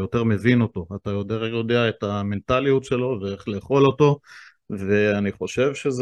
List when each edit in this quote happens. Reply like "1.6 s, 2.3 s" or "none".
none